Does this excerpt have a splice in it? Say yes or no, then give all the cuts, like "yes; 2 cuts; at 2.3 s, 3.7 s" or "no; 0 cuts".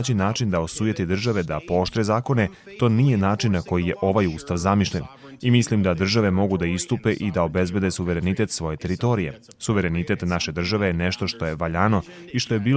no; 0 cuts